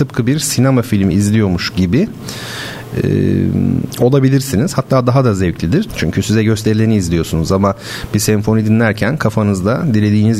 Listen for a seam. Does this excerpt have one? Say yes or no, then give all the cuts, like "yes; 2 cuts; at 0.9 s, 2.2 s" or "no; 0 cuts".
yes; 1 cut; at 5.9 s